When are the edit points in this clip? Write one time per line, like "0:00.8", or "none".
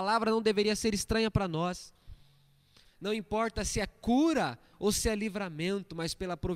0:02.8